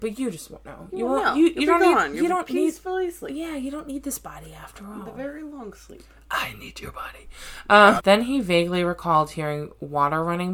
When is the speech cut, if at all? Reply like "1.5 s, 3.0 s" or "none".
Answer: 8.0 s